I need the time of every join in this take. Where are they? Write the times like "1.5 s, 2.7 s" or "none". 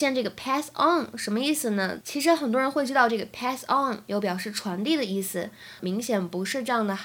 2.0 s, 5.8 s